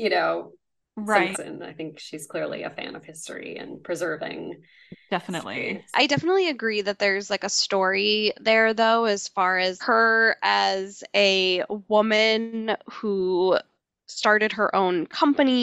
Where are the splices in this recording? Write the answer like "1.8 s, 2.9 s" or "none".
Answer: 1.3 s, 5.9 s, 9.8 s